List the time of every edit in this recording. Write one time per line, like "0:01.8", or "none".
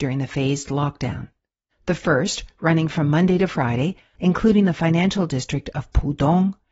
0:01.7
0:04.1